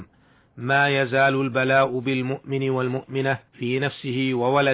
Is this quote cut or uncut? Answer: cut